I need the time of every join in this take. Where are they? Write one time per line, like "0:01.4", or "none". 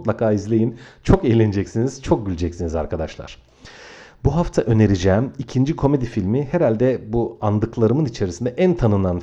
none